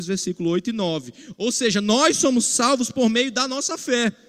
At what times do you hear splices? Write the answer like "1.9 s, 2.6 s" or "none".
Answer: 1.3 s